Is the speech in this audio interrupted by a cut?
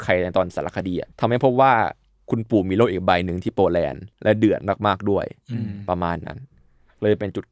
yes; 2 cuts; at 1.1 s, 4.1 s

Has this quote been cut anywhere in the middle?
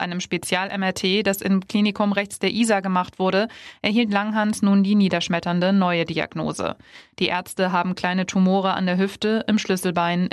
no; 0 cuts

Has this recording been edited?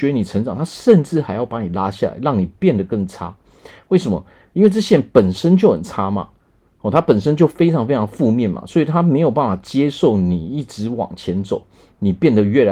no; 0 cuts

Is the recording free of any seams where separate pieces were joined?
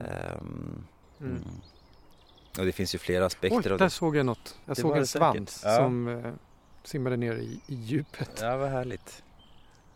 no; 2 cuts; at 1.0 s, 4.6 s

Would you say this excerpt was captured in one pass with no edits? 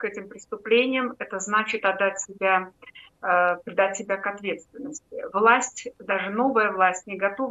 yes; 0 cuts

